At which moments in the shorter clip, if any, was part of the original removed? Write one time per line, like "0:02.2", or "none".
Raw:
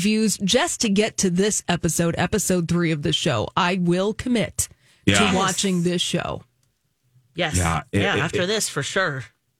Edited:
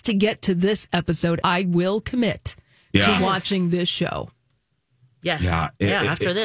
0:01.4